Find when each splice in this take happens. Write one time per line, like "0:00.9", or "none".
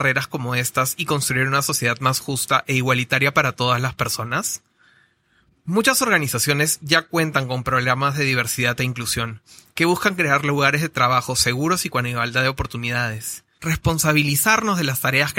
0:13.6